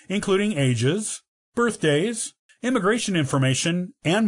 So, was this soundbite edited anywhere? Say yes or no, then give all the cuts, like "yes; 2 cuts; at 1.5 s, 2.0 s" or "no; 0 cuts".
yes; 1 cut; at 2.5 s